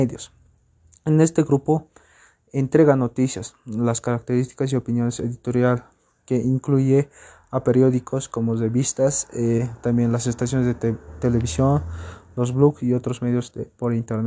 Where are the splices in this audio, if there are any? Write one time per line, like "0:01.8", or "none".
none